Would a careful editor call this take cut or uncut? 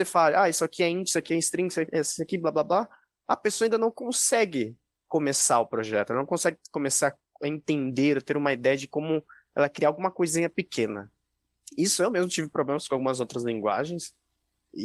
uncut